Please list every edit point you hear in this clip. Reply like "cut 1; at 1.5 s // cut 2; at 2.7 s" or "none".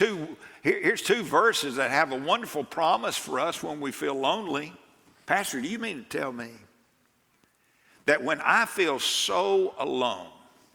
cut 1; at 5.2 s